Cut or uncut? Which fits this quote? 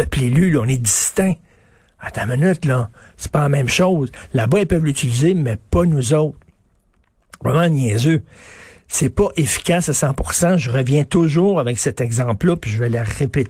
uncut